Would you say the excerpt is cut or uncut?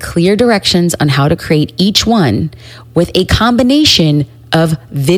uncut